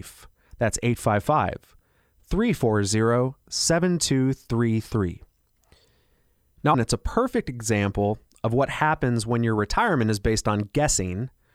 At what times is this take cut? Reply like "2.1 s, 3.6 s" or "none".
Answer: 6.7 s